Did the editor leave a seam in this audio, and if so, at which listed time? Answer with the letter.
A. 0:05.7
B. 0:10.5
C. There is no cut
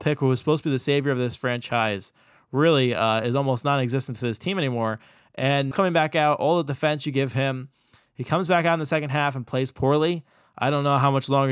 A